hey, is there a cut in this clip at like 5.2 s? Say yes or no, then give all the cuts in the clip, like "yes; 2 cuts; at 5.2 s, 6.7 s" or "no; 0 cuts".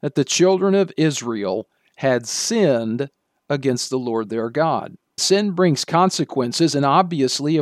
yes; 1 cut; at 5.2 s